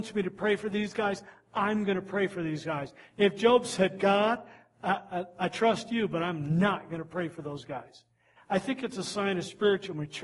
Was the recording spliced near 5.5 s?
no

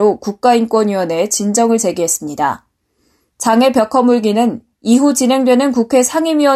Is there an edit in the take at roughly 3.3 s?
yes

